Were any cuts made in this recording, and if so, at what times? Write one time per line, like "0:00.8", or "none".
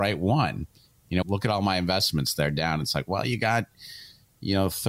0:01.2